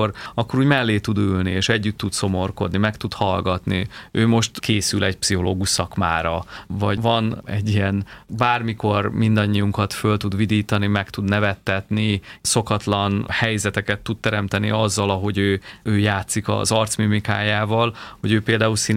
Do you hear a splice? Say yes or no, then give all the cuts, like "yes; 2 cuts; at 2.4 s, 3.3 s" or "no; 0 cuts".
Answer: no; 0 cuts